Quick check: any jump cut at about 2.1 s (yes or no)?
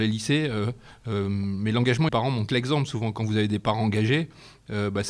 yes